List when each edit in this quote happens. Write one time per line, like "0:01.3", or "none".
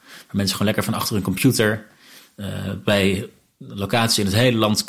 none

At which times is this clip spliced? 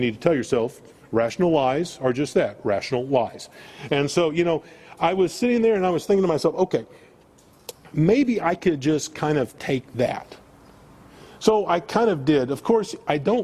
none

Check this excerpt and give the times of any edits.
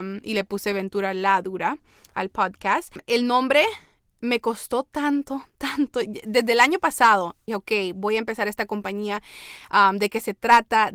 0:07.5

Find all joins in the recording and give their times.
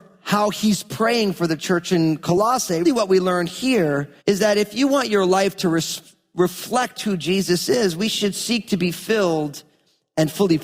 0:02.8
0:04.2

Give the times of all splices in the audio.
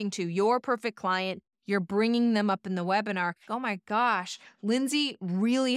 0:01.5
0:03.5

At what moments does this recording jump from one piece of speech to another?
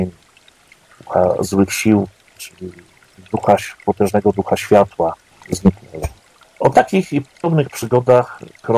0:02.4
0:05.3

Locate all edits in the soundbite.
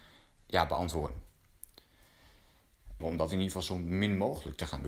0:03.0

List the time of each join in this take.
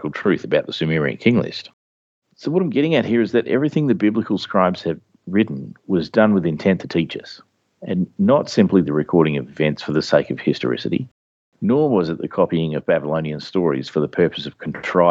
0:02.2

